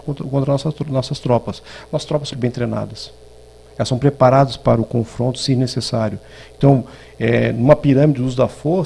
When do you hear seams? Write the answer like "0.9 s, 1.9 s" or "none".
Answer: 2.3 s